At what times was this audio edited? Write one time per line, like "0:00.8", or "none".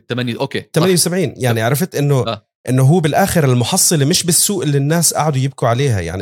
none